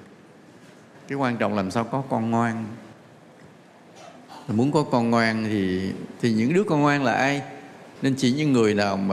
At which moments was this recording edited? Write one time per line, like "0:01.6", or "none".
0:08.0